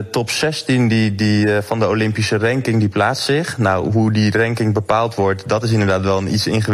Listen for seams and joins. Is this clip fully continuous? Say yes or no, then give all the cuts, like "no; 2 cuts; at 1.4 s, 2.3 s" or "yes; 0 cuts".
yes; 0 cuts